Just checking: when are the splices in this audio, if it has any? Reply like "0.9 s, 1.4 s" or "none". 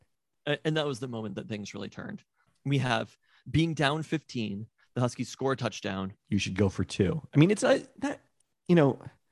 2.5 s, 6.2 s